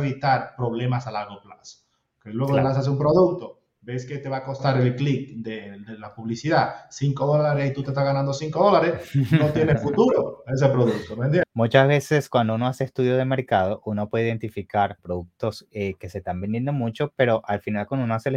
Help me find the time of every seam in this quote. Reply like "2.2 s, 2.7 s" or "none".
11.4 s, 15.0 s

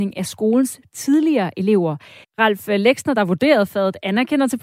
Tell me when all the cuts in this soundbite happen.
2.2 s

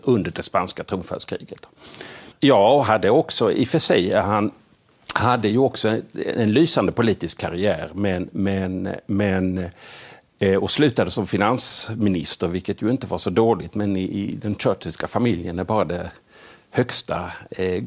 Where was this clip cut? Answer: 2.3 s

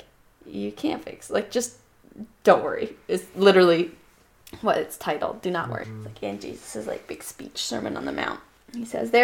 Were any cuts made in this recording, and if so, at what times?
5.8 s

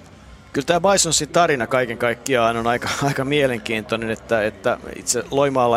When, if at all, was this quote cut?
none

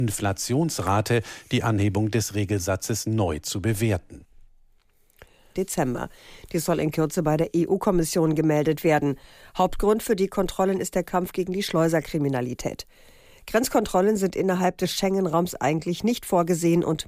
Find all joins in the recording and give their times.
5.6 s

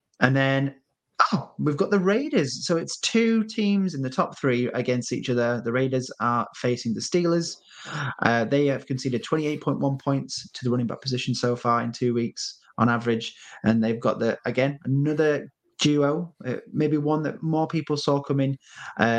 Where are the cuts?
none

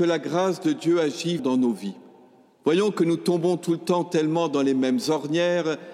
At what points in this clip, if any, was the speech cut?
1.4 s

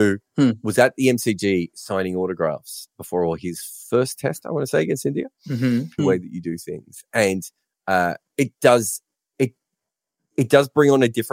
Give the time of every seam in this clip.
6.0 s

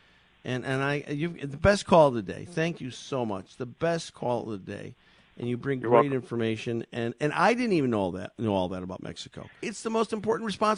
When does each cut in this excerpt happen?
9.6 s

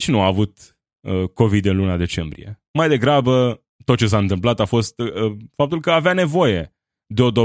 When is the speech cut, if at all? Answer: 3.7 s

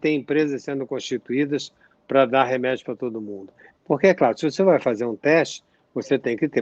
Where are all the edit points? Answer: 3.8 s

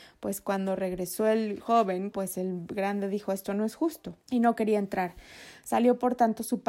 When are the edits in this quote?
2.1 s, 4.2 s

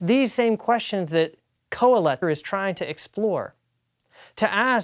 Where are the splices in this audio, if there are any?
2.2 s

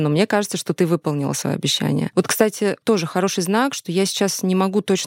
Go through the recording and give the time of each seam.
2.1 s

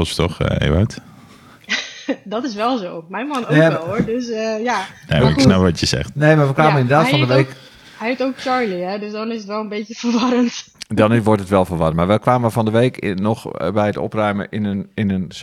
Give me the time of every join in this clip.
none

